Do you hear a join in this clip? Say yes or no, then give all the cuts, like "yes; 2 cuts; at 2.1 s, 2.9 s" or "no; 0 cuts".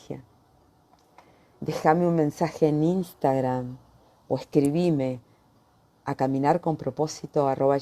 no; 0 cuts